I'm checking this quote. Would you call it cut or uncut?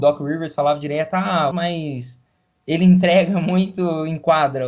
cut